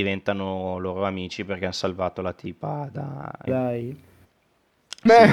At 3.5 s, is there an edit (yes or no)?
yes